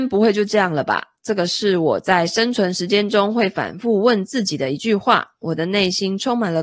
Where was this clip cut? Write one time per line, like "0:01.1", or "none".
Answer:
none